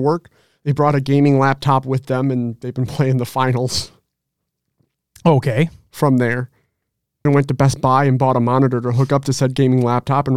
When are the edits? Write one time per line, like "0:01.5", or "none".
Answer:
0:07.3